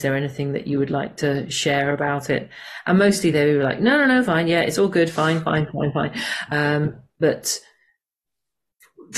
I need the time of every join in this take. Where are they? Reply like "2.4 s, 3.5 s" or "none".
4.2 s, 6.5 s